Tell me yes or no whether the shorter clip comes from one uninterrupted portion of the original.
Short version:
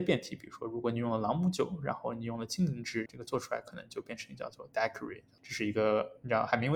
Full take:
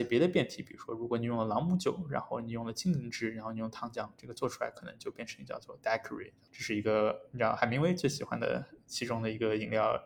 no